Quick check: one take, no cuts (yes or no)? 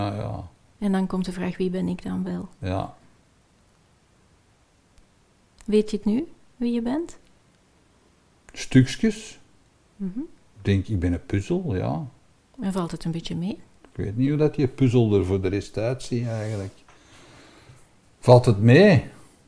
yes